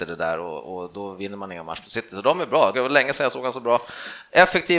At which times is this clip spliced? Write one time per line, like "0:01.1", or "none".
0:02.7